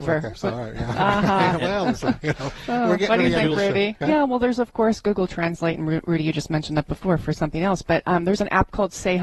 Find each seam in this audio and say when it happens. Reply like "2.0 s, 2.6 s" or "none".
4.0 s